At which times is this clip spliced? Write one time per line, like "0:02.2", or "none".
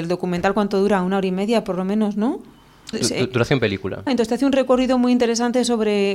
0:02.9
0:04.1